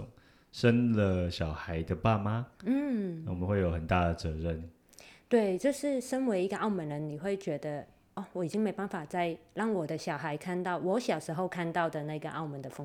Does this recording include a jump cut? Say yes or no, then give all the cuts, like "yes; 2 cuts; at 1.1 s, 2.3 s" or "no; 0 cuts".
no; 0 cuts